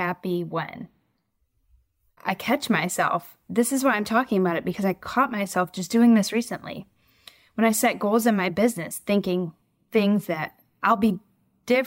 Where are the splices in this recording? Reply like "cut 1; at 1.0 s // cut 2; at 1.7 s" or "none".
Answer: none

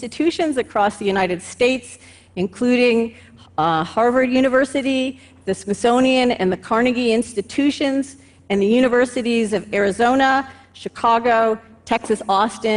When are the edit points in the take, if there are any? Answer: none

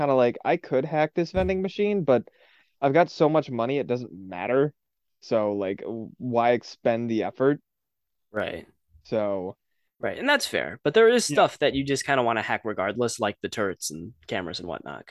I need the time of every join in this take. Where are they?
none

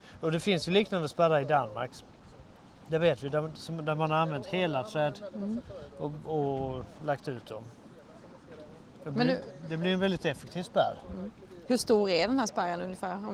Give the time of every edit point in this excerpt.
none

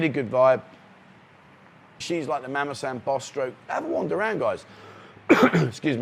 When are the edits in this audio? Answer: cut 1; at 2.0 s // cut 2; at 3.7 s

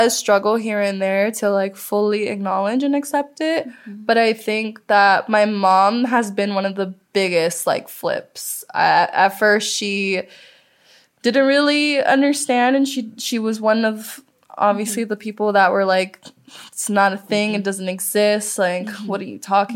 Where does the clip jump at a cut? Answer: none

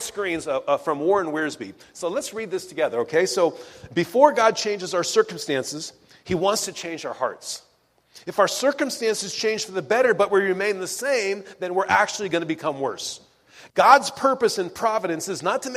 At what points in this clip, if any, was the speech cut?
none

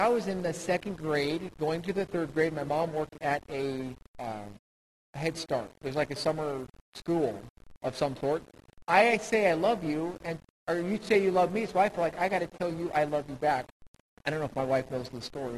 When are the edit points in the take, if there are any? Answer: cut 1; at 8.8 s // cut 2; at 14.1 s

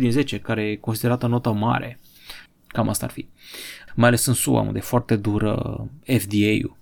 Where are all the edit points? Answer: cut 1; at 2.5 s // cut 2; at 3.9 s

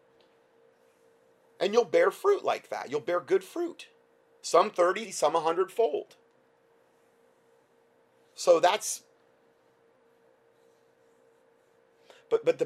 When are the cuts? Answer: cut 1; at 5.0 s

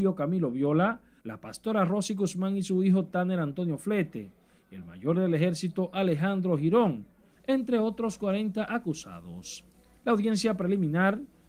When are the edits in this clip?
cut 1; at 1.2 s

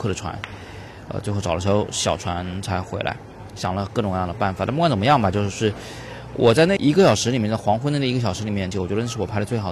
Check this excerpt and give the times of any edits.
cut 1; at 6.8 s // cut 2; at 8.7 s

